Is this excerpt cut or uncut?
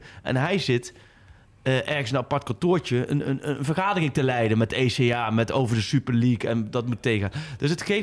uncut